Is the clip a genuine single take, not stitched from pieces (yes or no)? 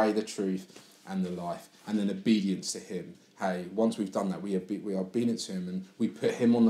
yes